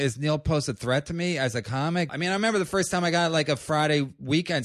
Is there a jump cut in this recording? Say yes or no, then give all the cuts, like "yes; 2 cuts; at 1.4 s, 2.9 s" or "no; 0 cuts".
yes; 1 cut; at 2.1 s